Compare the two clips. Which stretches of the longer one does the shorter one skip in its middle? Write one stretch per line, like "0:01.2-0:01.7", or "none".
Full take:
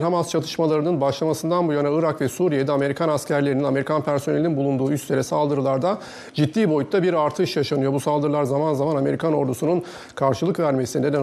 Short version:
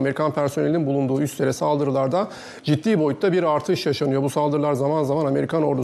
none